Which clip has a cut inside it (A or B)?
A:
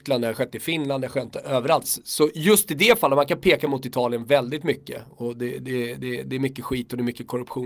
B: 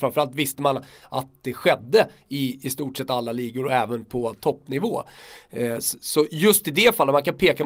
A